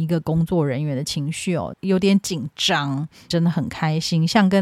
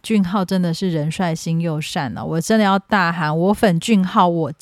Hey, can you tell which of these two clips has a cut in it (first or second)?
first